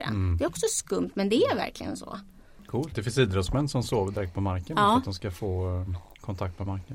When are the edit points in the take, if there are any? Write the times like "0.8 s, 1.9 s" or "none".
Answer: 2.9 s